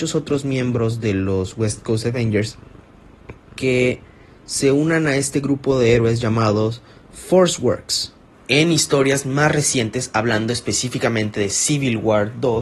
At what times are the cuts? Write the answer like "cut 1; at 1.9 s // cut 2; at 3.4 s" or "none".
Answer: cut 1; at 8.3 s